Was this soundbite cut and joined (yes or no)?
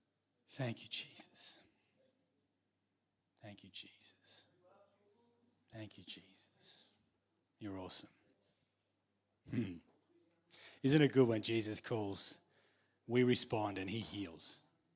no